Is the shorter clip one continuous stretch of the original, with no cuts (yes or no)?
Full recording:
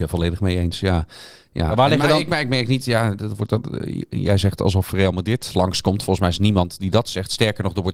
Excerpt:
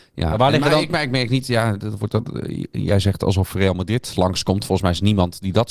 yes